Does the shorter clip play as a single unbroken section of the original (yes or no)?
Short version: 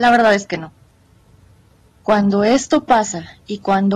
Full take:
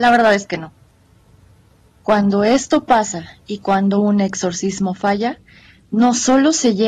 yes